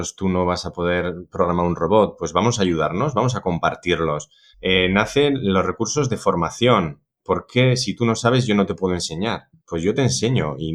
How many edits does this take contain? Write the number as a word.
one